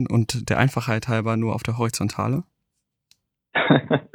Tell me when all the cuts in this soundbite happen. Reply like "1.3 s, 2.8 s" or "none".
none